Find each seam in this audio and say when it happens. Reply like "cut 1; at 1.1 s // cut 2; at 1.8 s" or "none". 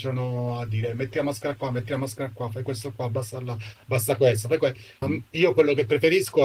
cut 1; at 5.0 s